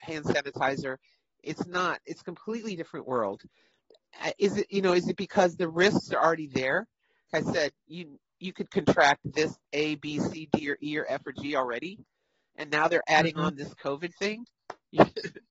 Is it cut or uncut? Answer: cut